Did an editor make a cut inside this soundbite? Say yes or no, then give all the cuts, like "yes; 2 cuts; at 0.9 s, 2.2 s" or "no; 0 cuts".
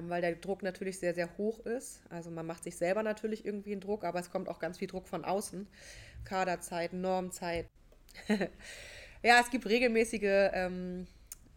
yes; 2 cuts; at 6.2 s, 7.8 s